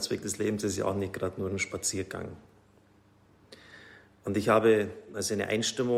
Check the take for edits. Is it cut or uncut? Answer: uncut